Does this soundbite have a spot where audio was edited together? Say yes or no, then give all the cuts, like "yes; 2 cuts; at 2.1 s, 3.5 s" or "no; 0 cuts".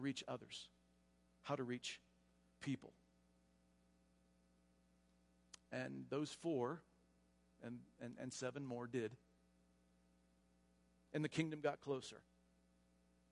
no; 0 cuts